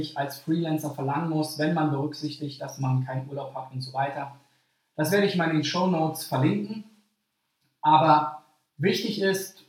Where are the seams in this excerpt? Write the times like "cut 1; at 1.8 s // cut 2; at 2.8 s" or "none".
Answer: none